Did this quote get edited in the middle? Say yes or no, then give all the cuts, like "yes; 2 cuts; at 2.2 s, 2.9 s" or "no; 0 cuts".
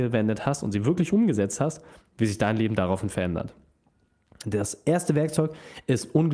no; 0 cuts